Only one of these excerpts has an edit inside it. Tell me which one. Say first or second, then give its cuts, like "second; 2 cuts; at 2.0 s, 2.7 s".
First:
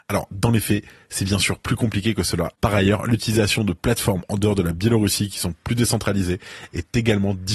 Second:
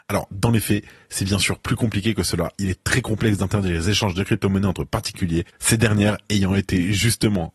first; 1 cut; at 2.5 s